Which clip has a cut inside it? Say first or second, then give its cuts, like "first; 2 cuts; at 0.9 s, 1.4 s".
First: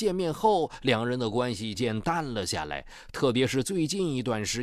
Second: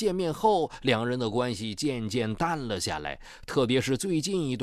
first; 1 cut; at 1.7 s